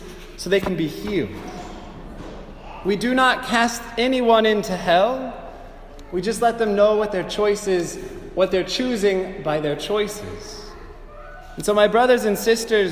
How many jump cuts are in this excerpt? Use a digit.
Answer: 0